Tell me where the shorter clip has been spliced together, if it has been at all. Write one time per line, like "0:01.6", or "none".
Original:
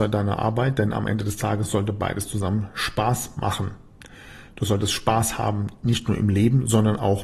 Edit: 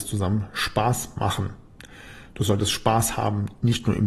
none